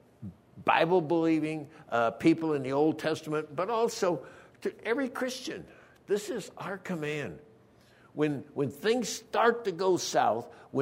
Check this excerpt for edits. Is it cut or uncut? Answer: uncut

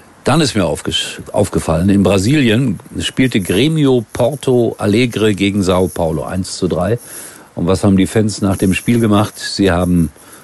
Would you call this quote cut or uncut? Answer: uncut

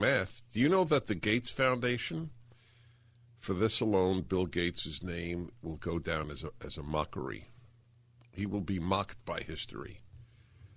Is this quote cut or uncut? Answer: uncut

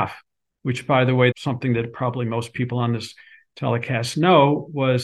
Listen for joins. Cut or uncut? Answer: cut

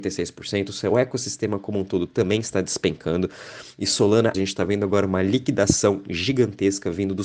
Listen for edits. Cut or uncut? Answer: cut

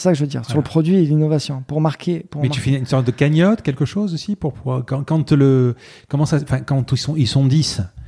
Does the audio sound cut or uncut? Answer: uncut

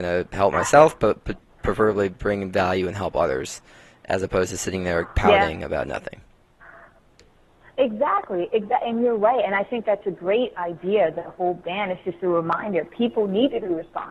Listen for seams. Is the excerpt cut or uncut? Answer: uncut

